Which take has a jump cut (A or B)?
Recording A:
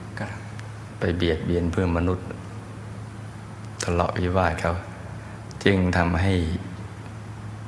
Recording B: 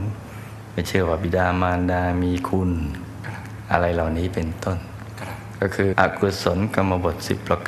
B